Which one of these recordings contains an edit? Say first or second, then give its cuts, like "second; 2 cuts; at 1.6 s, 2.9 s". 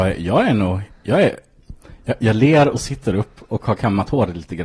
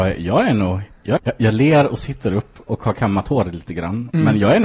second; 1 cut; at 1.2 s